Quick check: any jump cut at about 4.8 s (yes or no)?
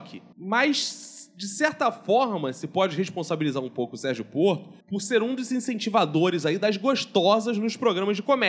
yes